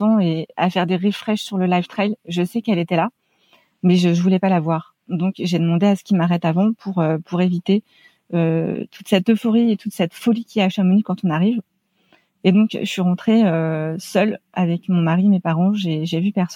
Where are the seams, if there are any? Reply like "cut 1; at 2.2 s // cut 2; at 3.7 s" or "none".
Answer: none